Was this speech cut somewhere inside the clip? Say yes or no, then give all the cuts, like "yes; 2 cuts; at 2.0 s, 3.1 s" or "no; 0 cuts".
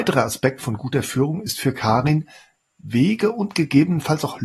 no; 0 cuts